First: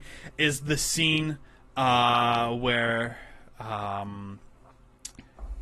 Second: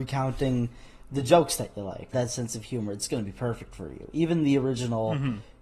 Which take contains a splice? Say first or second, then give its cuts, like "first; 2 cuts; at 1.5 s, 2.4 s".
second; 1 cut; at 2.1 s